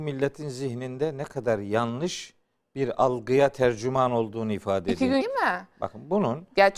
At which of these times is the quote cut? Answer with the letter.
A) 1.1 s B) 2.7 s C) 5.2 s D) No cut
C